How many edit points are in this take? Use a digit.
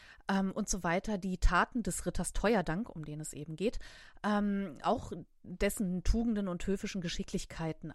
0